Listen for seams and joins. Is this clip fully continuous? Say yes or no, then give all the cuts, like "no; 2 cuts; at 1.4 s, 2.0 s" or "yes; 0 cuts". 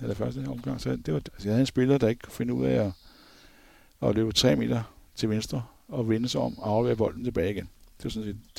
no; 1 cut; at 1.2 s